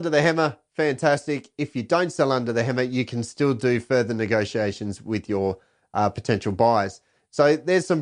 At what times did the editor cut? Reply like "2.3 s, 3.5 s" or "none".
none

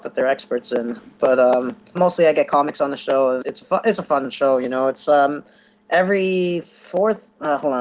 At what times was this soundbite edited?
1.9 s, 3.4 s

